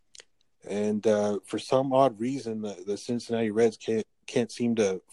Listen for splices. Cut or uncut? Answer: uncut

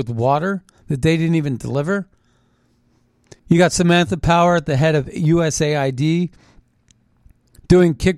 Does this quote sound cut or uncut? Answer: cut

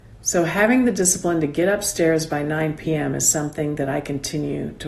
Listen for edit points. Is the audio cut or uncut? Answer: uncut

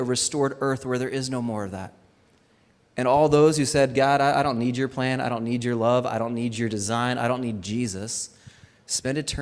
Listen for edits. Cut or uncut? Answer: uncut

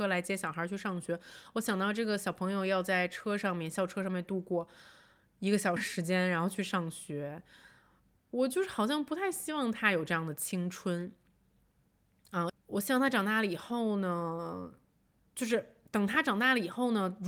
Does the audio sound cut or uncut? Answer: cut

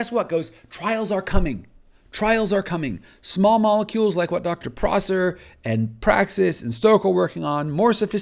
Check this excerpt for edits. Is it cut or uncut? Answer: cut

